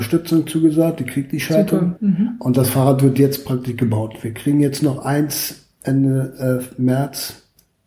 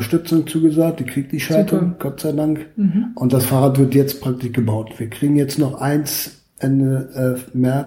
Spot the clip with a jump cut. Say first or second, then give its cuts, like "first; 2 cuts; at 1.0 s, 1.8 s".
first; 1 cut; at 2.0 s